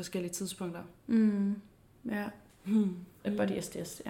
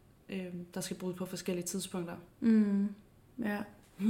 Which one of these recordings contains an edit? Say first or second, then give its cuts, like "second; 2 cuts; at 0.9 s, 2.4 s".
first; 1 cut; at 3.2 s